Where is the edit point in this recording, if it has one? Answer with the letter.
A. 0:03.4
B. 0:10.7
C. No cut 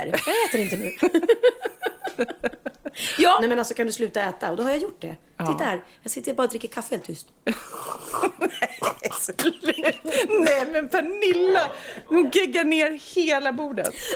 A